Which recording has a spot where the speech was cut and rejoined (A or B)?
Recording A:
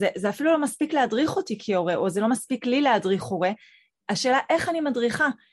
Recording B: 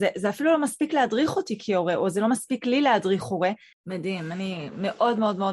B